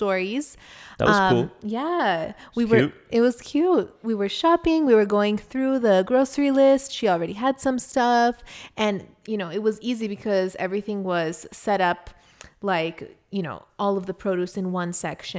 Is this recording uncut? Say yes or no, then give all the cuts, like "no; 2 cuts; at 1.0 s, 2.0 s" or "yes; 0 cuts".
yes; 0 cuts